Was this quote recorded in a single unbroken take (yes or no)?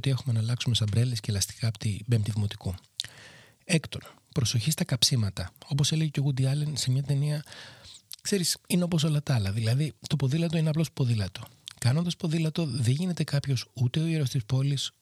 yes